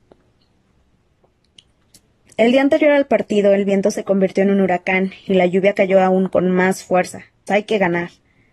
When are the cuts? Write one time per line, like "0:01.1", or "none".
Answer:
0:07.5